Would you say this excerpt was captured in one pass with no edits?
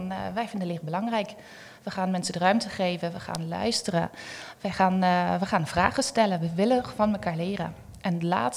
yes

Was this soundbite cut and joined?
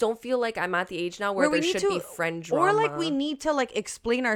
no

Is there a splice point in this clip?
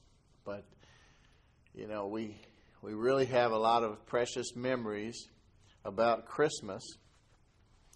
no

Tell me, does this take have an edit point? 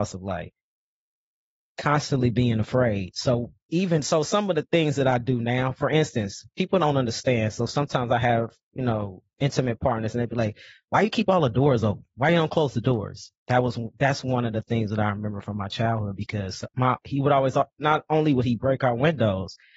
no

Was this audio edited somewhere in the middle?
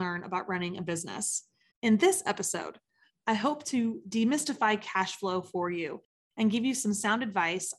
yes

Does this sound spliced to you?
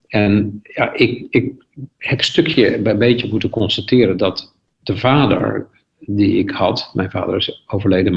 no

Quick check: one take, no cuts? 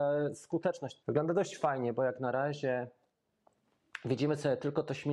no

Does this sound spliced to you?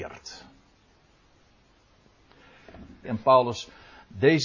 yes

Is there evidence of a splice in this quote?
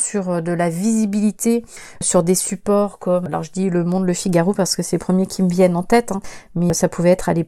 no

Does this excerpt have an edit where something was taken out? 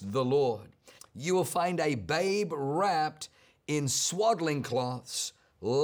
yes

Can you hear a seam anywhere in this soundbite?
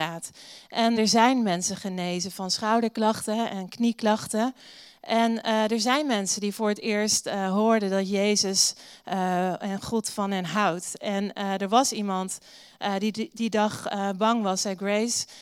yes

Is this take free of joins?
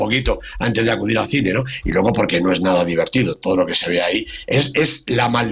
yes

